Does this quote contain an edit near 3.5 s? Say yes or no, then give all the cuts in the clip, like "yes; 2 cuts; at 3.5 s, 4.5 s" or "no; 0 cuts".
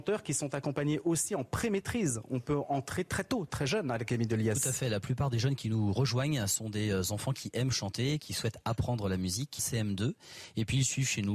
no; 1 cut; at 9.6 s